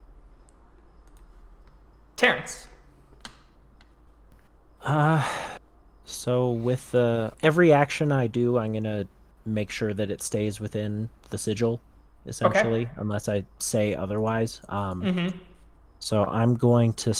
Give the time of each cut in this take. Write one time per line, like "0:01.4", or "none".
0:07.3